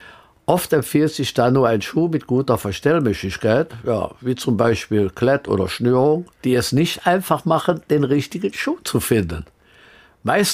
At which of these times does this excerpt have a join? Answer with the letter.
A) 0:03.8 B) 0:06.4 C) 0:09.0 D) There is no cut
B